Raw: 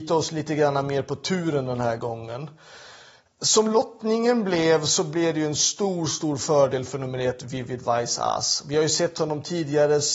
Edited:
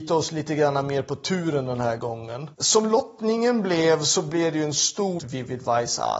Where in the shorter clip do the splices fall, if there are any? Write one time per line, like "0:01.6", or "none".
0:02.5
0:05.2